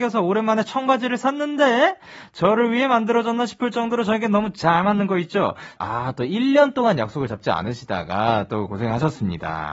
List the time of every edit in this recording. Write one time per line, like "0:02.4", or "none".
0:05.8